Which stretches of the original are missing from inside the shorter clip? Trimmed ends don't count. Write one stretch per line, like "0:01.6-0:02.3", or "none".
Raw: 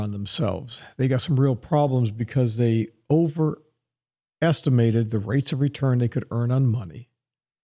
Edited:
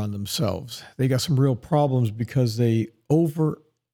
none